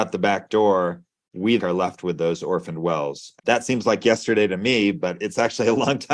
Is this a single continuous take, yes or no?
no